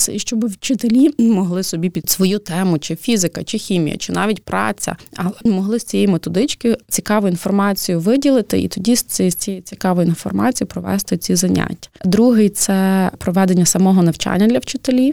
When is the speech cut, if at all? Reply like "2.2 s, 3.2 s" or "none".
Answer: 4.0 s, 12.0 s